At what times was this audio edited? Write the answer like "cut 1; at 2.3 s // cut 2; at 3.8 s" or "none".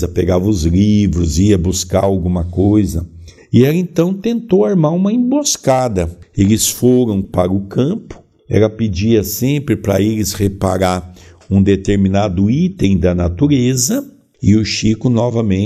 cut 1; at 7.2 s // cut 2; at 14.3 s